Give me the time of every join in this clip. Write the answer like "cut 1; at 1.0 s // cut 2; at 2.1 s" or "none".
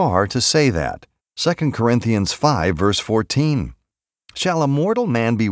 cut 1; at 1.2 s